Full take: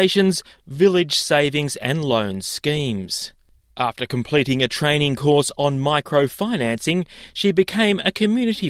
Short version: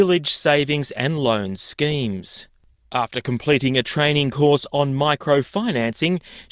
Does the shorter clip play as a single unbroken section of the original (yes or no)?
yes